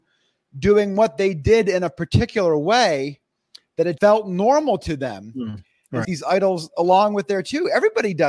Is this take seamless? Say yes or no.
no